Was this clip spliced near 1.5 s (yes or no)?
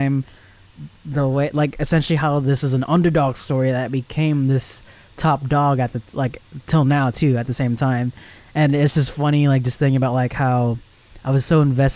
no